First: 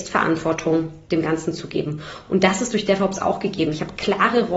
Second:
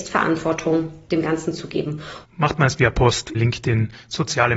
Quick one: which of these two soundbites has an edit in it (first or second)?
second